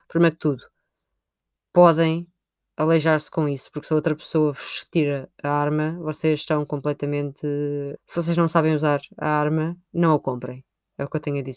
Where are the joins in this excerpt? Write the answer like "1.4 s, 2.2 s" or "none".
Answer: 8.0 s